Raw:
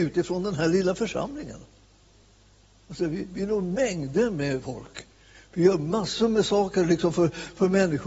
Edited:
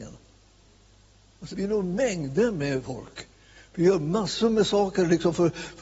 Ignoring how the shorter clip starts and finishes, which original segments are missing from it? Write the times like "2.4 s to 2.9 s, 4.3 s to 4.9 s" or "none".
3.0 s to 3.3 s